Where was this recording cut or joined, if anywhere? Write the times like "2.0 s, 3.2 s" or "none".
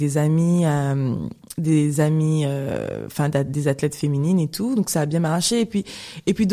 none